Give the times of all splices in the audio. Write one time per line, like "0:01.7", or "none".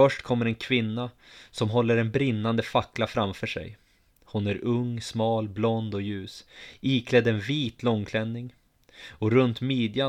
none